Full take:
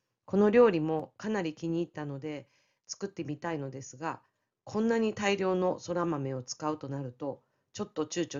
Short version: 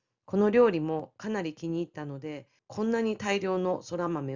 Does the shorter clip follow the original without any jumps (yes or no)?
no